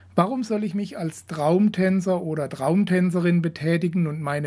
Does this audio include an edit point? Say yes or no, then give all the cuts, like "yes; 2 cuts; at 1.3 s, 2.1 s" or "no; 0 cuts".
no; 0 cuts